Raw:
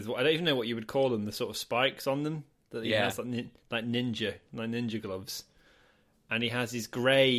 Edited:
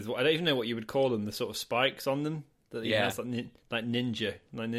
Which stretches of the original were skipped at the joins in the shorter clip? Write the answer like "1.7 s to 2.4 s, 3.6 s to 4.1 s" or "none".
none